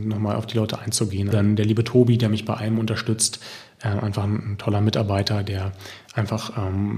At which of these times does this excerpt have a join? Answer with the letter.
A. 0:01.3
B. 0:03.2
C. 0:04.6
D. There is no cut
A